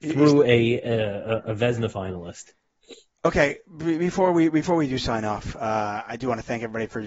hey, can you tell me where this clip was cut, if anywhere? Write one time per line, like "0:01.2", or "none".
none